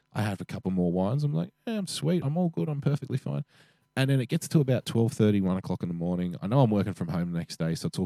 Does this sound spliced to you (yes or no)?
no